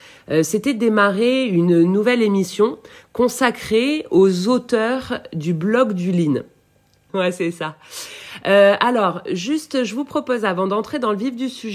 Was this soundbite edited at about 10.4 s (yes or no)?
no